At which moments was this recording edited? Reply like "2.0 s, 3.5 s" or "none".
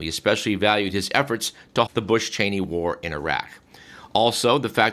1.9 s